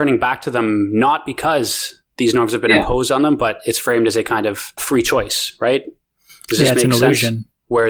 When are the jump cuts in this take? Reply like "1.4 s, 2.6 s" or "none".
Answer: 4.8 s